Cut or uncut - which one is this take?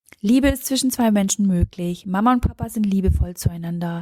uncut